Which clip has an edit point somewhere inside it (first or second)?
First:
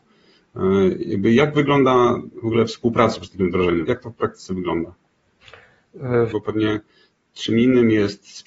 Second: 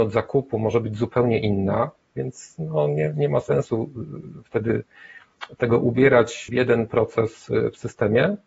first